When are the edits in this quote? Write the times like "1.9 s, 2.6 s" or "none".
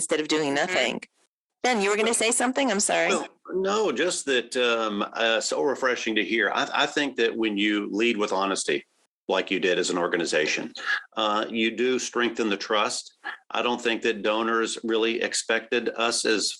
none